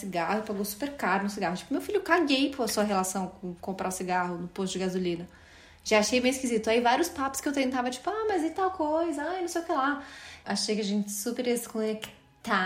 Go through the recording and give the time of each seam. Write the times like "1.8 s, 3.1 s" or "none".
10.4 s